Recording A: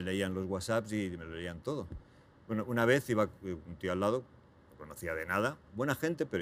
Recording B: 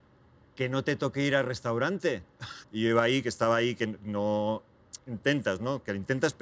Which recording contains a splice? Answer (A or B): B